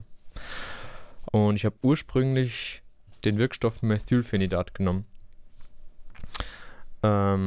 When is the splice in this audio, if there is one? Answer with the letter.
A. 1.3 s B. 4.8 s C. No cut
A